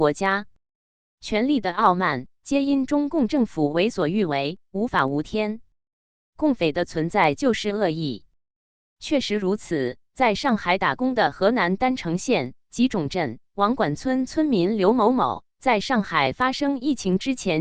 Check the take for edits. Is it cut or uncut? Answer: uncut